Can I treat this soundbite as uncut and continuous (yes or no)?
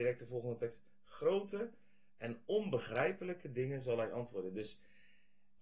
yes